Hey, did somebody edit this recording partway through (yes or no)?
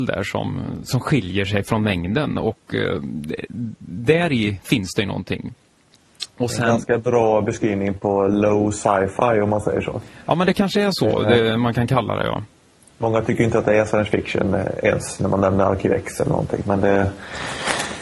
no